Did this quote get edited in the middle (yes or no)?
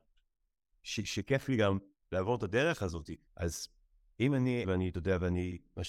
yes